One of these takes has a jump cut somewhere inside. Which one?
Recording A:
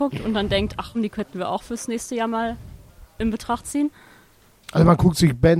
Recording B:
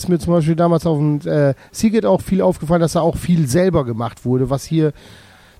A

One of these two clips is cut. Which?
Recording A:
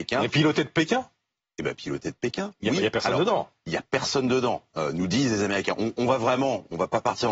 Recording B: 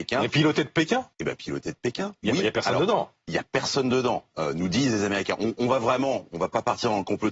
B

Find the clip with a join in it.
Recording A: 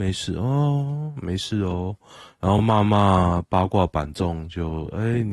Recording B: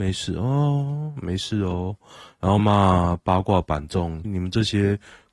B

